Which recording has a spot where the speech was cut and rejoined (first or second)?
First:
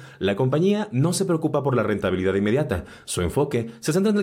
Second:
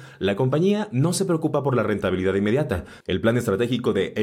second